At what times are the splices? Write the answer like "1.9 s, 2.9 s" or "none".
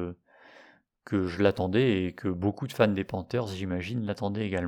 none

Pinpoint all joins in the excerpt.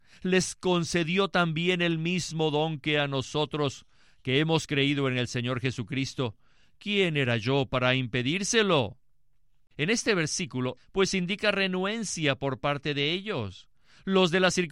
9.7 s, 10.8 s

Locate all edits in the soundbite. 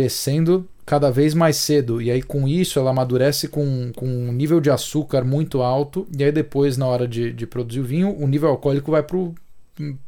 none

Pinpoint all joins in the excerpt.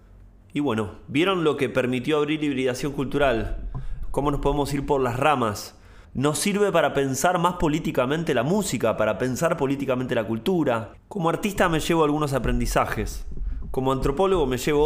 6.0 s, 11.0 s

